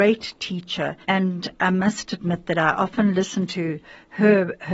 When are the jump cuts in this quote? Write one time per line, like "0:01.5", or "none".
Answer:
0:01.0